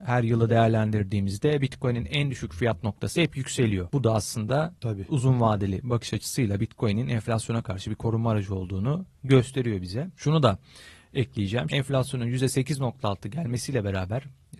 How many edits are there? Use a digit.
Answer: 1